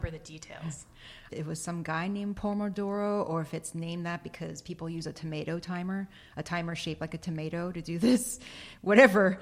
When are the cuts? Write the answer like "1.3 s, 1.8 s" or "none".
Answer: 1.3 s